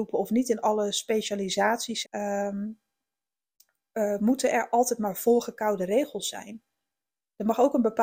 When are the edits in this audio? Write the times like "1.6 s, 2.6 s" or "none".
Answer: 2.0 s